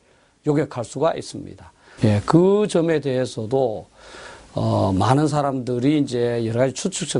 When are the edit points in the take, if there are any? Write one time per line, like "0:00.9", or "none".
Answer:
0:02.0

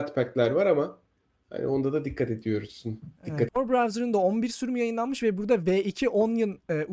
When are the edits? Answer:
0:03.5

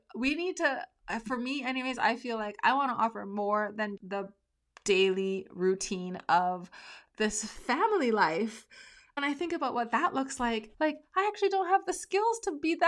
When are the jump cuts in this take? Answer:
0:04.0
0:10.7

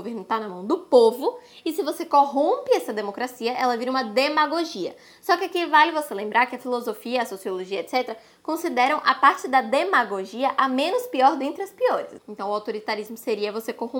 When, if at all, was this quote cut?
0:12.2

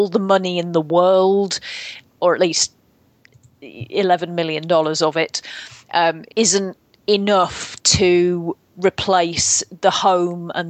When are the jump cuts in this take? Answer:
0:06.3

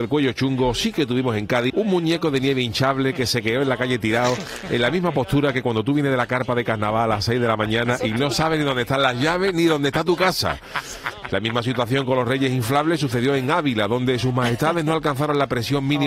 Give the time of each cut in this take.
0:01.7
0:11.2

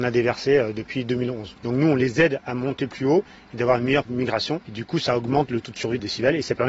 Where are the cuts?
0:01.6

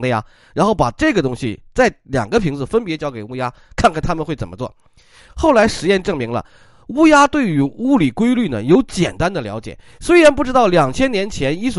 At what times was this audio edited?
none

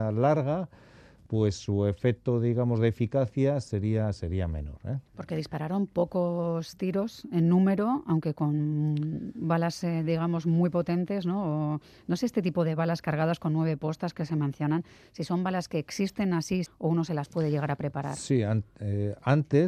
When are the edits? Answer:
0:16.7

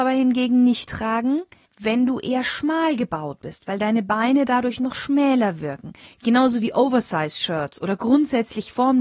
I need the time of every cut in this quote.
none

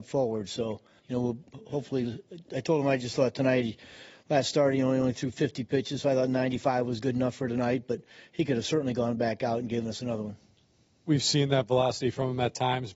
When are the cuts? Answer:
0:01.0

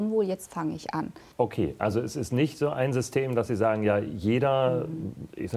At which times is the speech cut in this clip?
0:01.3

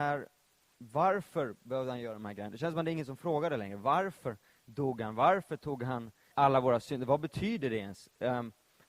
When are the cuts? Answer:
0:06.3

